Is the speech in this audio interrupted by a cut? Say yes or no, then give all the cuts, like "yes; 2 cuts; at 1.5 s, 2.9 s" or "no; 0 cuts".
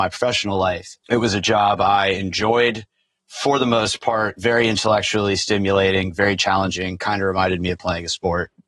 yes; 1 cut; at 1.0 s